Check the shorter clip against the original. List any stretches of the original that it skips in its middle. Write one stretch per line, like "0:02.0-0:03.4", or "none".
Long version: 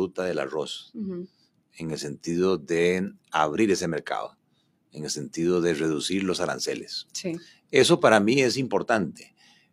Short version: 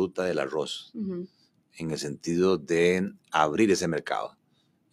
none